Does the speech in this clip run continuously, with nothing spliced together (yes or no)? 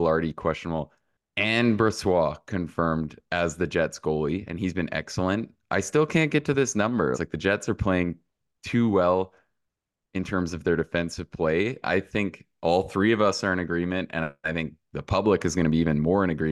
no